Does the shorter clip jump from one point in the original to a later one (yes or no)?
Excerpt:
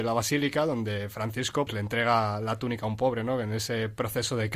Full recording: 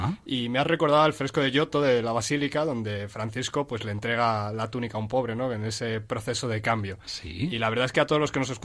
yes